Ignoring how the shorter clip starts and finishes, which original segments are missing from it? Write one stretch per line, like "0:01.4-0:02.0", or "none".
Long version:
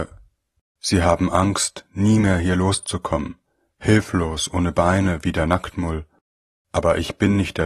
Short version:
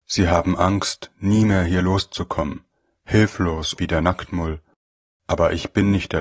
0:04.5-0:05.2